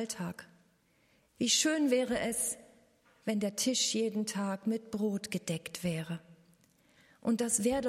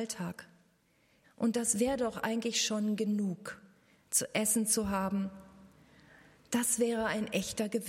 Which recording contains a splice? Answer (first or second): second